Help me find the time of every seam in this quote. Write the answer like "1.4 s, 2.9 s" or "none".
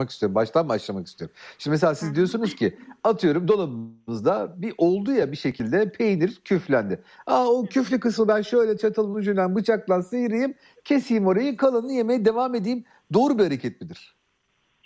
none